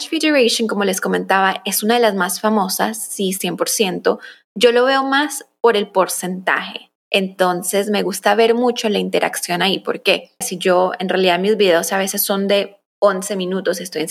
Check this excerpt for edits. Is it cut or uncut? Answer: cut